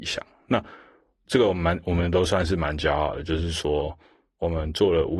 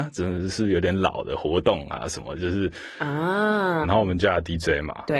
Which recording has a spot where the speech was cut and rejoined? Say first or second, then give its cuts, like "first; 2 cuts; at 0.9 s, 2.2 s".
second; 1 cut; at 3.8 s